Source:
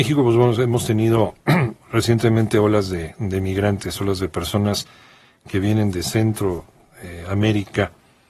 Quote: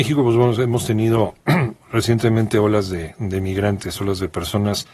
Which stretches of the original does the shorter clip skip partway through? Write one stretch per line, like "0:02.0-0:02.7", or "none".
none